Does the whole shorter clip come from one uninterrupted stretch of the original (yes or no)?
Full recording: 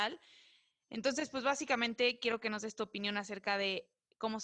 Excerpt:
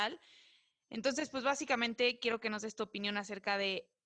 yes